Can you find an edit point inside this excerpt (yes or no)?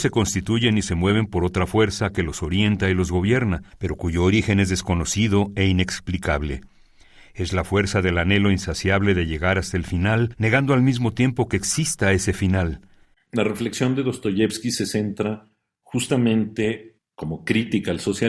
yes